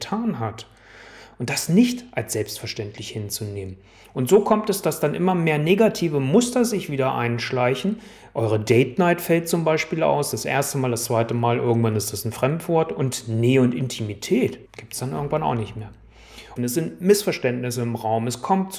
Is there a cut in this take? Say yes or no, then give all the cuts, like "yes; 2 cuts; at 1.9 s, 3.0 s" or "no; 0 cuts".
yes; 2 cuts; at 14.7 s, 16.6 s